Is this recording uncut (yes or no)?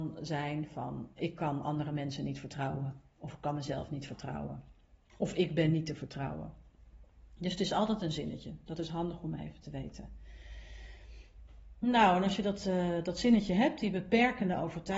no